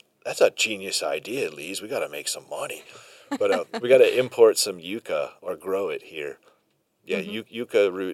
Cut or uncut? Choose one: uncut